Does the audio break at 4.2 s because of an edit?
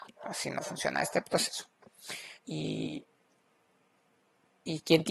no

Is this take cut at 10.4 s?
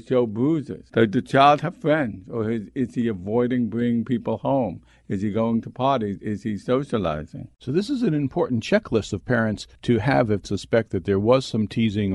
yes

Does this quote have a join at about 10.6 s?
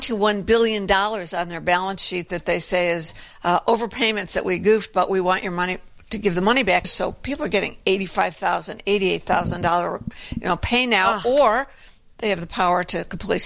no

